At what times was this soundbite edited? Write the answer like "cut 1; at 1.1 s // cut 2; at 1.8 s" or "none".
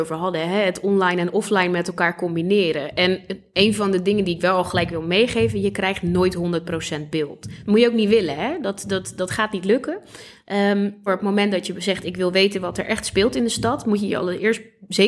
cut 1; at 11.1 s